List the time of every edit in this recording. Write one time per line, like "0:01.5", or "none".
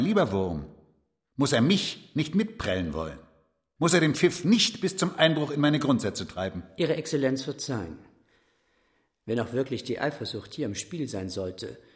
0:03.8